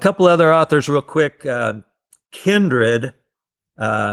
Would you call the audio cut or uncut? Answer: uncut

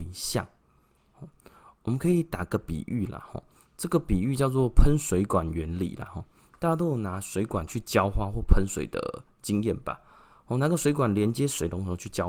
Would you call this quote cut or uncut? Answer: uncut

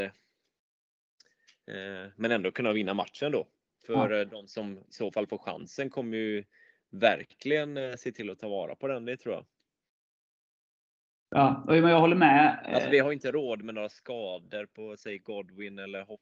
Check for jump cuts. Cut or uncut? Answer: uncut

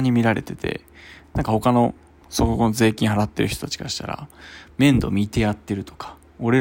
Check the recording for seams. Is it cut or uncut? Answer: uncut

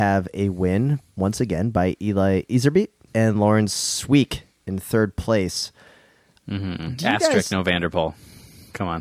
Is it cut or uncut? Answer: cut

